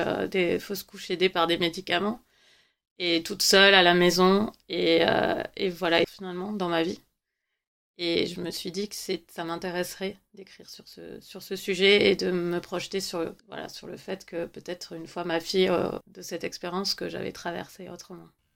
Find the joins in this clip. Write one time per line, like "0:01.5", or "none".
0:06.0
0:13.4
0:16.0